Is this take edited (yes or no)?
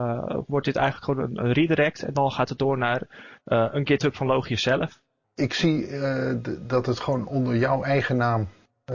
yes